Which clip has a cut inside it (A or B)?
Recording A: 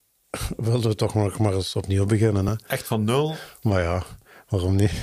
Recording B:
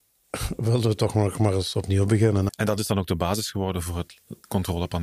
B